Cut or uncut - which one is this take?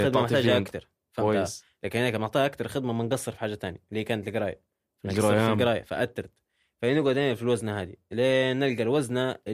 uncut